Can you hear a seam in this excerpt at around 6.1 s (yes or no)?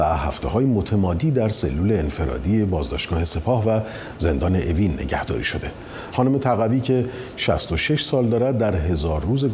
yes